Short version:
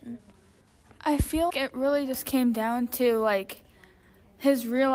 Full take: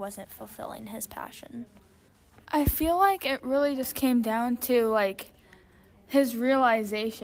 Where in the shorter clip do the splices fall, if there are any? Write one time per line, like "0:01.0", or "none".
0:01.5